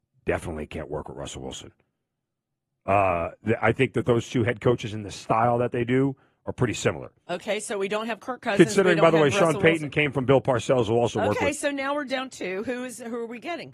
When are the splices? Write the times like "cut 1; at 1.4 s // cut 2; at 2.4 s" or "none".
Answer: none